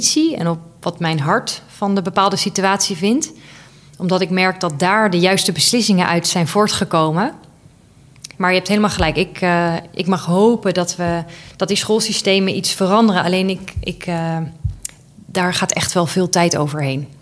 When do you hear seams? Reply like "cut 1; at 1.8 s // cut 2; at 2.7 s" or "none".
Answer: cut 1; at 8.3 s

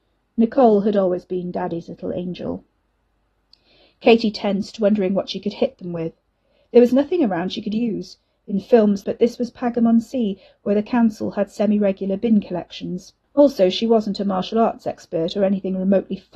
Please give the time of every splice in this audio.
cut 1; at 9.0 s // cut 2; at 13.2 s

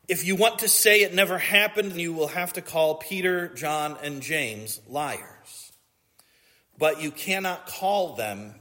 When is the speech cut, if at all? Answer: cut 1; at 1.9 s

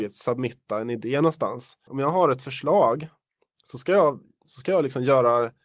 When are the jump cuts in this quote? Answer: cut 1; at 1.9 s

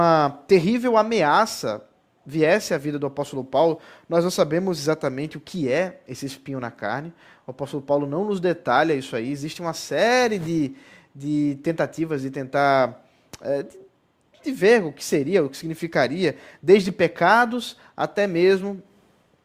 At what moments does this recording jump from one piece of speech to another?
none

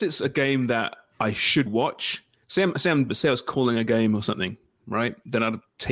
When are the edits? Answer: cut 1; at 1.7 s // cut 2; at 3.1 s

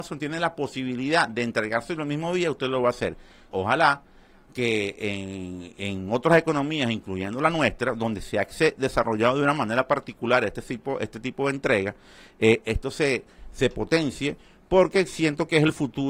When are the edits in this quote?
cut 1; at 3.5 s

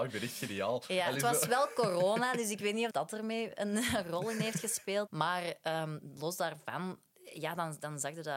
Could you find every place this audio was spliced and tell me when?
cut 1; at 2.9 s // cut 2; at 5.1 s

